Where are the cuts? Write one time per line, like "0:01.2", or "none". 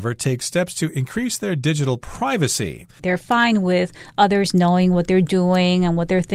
0:03.0